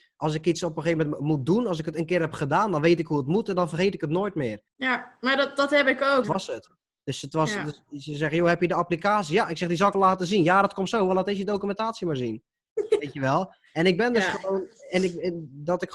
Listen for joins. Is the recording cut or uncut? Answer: cut